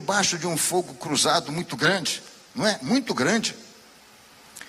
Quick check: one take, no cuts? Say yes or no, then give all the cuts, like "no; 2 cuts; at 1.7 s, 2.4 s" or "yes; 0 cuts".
yes; 0 cuts